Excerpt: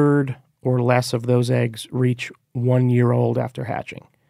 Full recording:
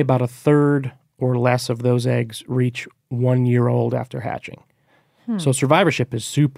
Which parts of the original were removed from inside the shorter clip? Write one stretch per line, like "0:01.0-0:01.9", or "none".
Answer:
none